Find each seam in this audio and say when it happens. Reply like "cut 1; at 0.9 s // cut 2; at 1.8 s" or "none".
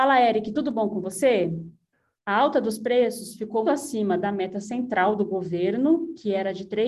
cut 1; at 2.1 s // cut 2; at 3.6 s